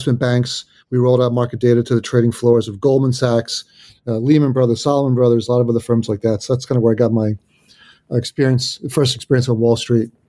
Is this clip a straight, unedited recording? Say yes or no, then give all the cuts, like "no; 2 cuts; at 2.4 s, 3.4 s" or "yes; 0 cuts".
yes; 0 cuts